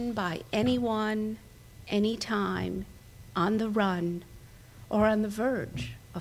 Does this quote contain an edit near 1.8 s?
no; 1 cut; at 3.3 s

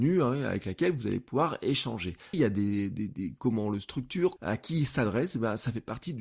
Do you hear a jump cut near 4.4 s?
yes; 2 cuts; at 2.3 s, 4.4 s

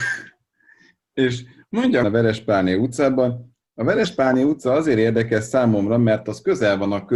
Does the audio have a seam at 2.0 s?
yes; 1 cut; at 2.0 s

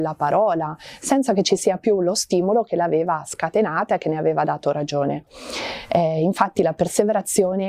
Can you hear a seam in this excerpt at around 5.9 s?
no; 0 cuts

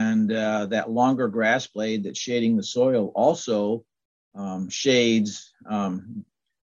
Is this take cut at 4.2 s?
no; 0 cuts

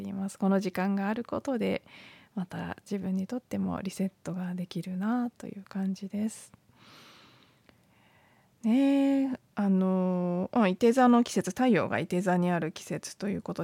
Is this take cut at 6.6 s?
no; 1 cut; at 9.5 s

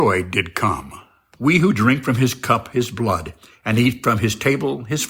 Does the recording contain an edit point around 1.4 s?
yes; 1 cut; at 1.4 s

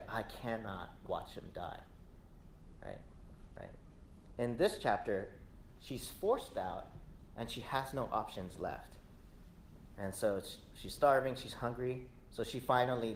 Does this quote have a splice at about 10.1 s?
no; 1 cut; at 3.6 s

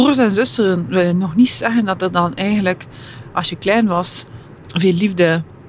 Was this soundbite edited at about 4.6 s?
yes; 1 cut; at 4.6 s

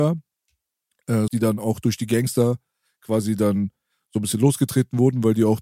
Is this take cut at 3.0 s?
no; 1 cut; at 1.3 s

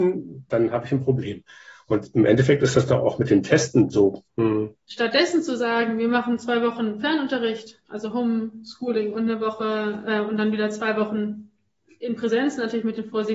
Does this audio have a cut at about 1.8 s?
no; 1 cut; at 4.3 s

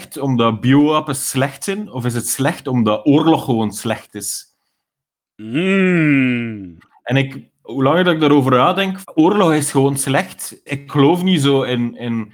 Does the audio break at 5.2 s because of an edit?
no; 2 cuts; at 9.0 s, 10.7 s

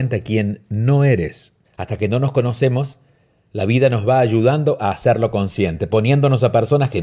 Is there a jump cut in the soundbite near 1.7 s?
yes; 1 cut; at 1.7 s

